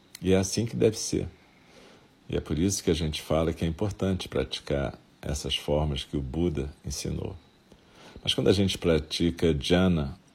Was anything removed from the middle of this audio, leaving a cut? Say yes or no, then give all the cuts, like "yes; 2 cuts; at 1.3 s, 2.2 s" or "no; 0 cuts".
no; 0 cuts